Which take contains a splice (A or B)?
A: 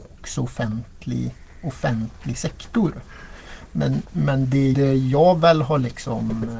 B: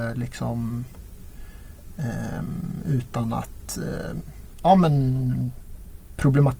A